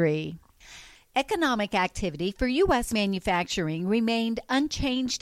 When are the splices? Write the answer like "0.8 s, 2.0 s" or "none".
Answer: none